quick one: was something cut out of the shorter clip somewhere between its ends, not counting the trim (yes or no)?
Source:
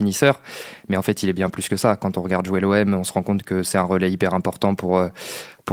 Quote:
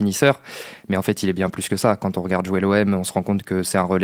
no